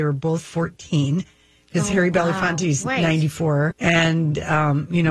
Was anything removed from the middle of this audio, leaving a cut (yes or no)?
yes